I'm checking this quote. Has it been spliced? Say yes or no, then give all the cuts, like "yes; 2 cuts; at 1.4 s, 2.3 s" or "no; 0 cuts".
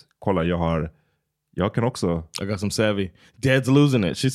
no; 0 cuts